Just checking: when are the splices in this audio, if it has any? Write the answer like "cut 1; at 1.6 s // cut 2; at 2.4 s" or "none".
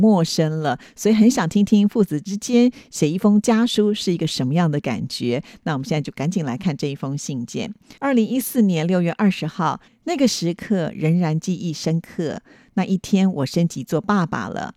cut 1; at 8.0 s // cut 2; at 9.9 s